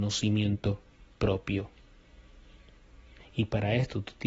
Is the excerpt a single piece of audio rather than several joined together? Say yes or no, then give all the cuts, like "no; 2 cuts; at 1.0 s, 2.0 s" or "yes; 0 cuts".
no; 1 cut; at 3.2 s